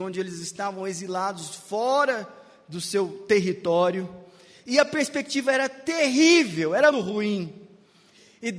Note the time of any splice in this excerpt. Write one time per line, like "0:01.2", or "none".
0:06.9